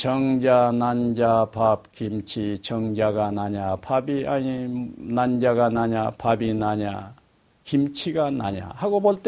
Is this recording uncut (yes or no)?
yes